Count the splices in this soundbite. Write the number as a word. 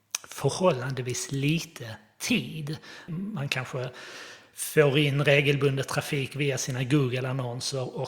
one